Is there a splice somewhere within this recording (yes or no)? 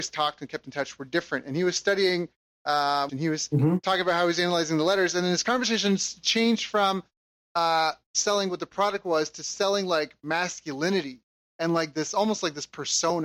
yes